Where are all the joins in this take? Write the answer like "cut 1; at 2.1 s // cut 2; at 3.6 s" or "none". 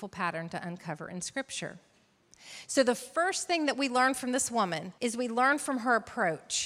cut 1; at 5.0 s